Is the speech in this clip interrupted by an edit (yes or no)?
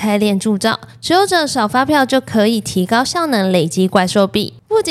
no